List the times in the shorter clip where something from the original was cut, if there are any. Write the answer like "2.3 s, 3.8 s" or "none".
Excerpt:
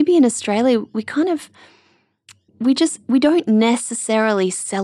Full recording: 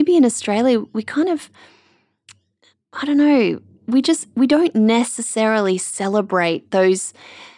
2.5 s